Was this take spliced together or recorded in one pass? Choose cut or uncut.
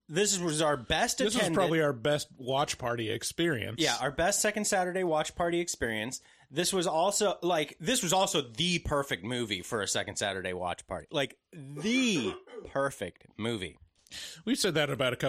uncut